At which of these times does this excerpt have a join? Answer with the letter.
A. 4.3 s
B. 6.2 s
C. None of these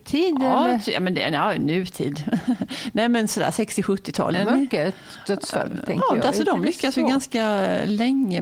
A